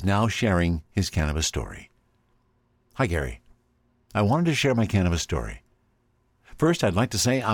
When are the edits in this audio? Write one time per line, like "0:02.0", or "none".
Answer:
none